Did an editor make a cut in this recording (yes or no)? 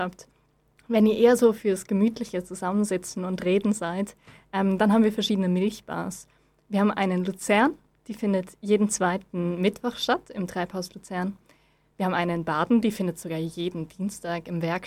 no